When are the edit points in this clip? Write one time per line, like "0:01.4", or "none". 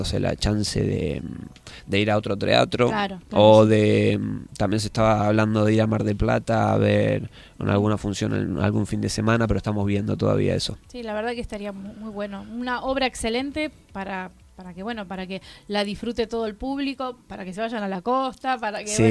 none